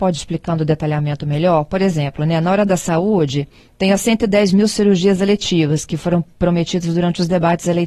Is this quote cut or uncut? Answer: uncut